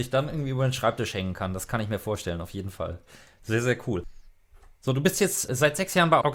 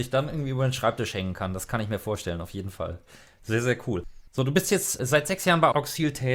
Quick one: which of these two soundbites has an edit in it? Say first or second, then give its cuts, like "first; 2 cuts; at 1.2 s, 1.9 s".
second; 1 cut; at 4.3 s